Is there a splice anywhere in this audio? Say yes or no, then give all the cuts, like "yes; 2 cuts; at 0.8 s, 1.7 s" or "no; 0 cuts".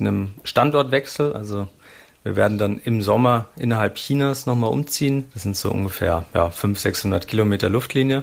no; 0 cuts